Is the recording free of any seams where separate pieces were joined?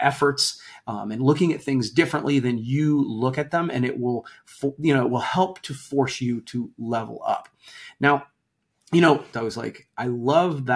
no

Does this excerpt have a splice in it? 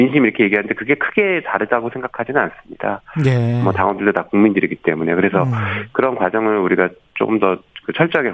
no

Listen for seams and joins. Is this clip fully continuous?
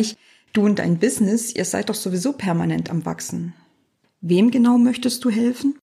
no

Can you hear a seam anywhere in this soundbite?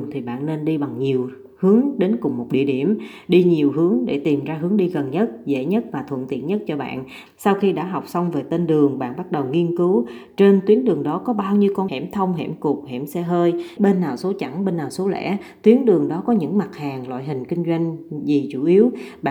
yes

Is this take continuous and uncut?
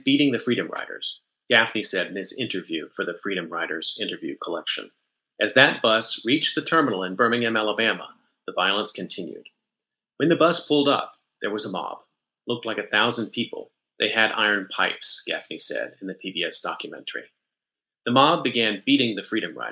yes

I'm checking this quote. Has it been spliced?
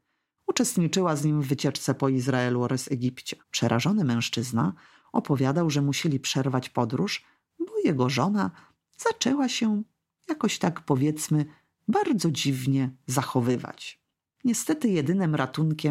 yes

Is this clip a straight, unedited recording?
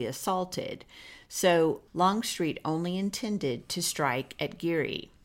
no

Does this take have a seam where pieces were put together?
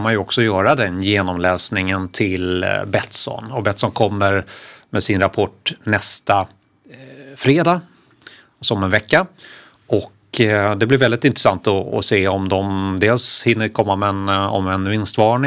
no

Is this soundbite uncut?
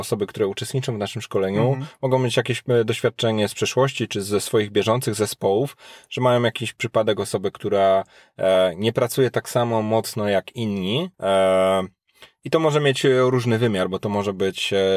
no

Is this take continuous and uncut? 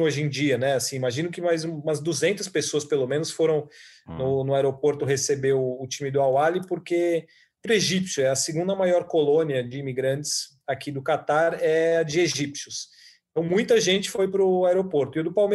no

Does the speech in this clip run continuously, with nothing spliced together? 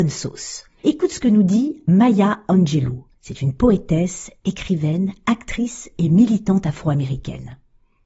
no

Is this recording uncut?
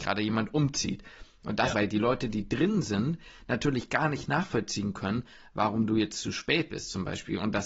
no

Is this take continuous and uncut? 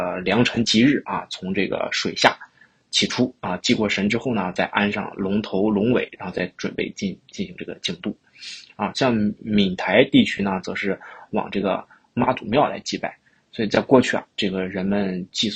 yes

